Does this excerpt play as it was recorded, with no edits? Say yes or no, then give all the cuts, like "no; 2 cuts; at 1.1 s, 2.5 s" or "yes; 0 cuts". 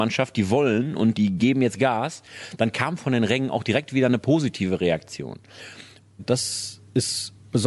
no; 1 cut; at 6.2 s